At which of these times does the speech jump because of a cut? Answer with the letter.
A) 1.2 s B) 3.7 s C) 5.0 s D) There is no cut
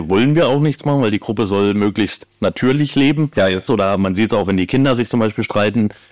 B